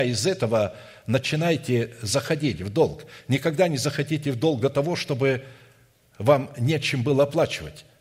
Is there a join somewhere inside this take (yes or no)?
no